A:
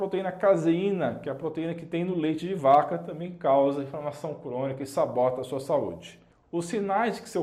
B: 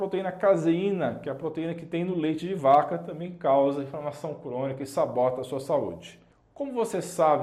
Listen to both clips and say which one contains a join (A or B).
A